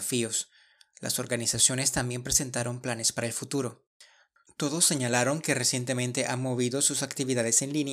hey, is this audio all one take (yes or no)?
yes